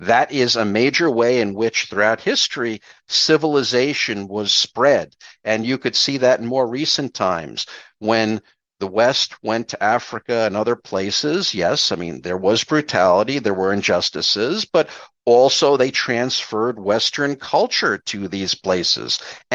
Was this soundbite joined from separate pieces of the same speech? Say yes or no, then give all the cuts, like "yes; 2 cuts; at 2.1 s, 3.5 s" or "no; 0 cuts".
no; 0 cuts